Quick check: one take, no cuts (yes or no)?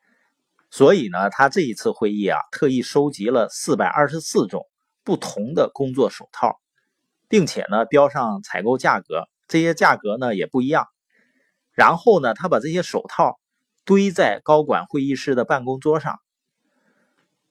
yes